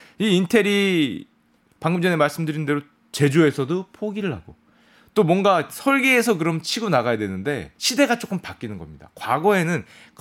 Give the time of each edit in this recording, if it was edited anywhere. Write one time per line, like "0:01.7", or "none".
0:07.7